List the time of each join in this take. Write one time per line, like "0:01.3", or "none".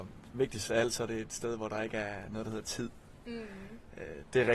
none